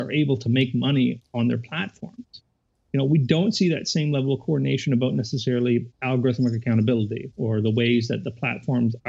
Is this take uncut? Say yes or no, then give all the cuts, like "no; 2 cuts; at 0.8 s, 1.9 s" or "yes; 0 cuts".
no; 1 cut; at 2.9 s